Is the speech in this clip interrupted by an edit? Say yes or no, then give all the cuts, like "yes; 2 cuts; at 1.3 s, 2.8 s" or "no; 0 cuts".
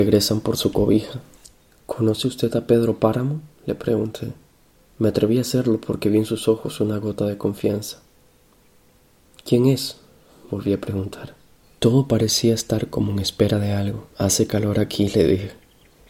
yes; 2 cuts; at 11.6 s, 14.1 s